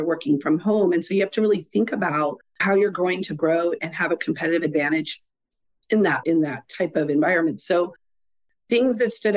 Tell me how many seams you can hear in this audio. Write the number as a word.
two